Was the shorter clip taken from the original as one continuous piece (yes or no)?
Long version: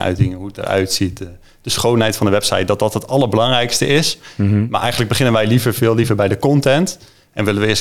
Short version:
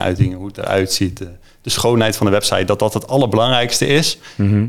yes